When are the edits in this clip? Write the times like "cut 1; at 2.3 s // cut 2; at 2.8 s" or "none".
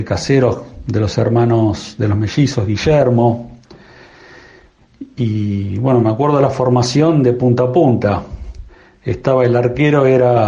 none